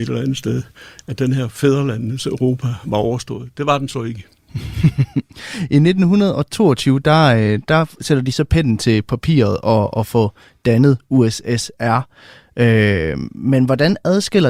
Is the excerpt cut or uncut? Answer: uncut